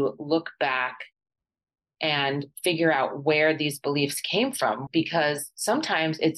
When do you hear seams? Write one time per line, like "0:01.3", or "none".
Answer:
0:04.9